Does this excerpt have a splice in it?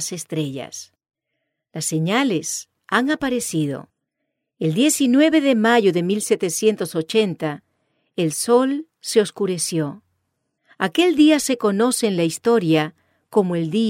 no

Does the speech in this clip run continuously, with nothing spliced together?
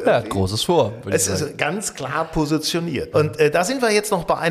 no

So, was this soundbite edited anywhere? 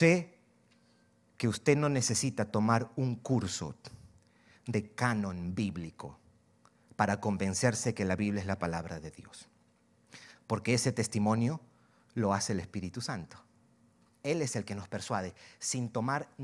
yes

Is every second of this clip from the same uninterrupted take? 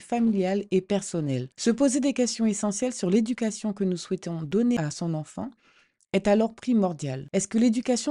yes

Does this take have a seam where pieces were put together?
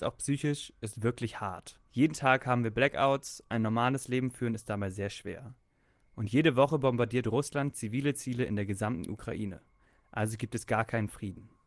yes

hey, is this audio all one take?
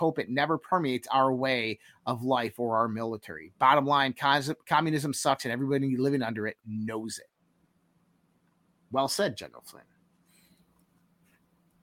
yes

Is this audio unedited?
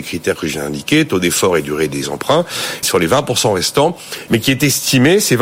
no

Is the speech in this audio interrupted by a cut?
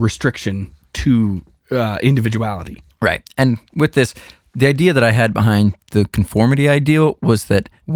no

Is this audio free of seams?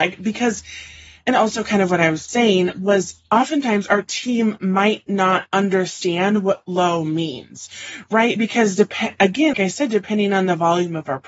no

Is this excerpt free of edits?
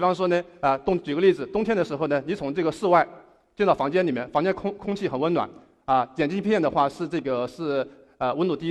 yes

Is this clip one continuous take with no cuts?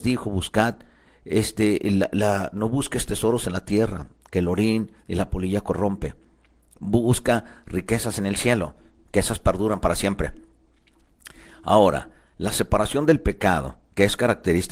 yes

